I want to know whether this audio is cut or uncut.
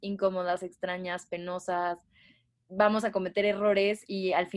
uncut